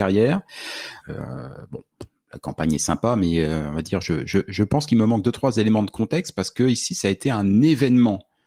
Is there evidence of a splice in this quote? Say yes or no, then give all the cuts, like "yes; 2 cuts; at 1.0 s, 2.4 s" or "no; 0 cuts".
yes; 1 cut; at 1.0 s